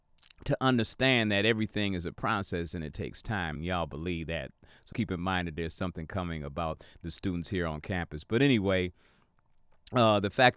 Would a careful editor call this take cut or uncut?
cut